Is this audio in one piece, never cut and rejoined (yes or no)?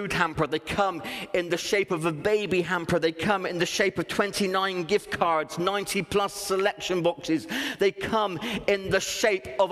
yes